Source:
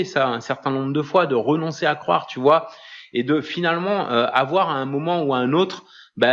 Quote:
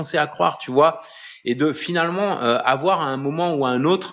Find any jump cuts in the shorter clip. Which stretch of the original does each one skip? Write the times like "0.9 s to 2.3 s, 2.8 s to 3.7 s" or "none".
none